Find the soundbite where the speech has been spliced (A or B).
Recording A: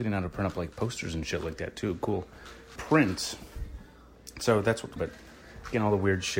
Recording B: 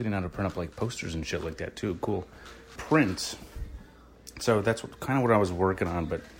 A